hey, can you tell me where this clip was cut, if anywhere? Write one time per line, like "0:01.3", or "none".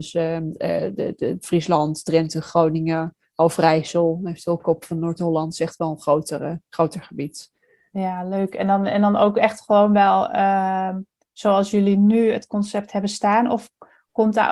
none